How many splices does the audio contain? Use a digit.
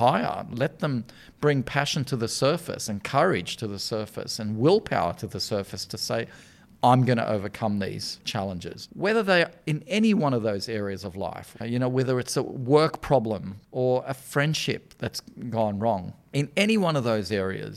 1